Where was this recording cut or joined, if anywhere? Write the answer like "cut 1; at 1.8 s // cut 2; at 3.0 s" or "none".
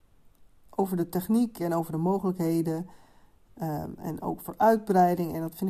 none